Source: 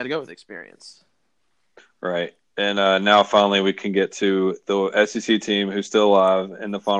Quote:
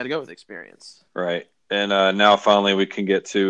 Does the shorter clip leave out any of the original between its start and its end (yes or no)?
yes